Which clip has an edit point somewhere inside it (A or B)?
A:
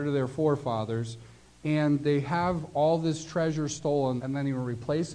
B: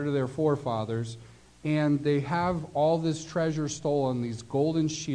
A